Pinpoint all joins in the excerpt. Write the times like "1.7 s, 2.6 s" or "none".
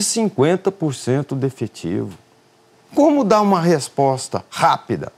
2.7 s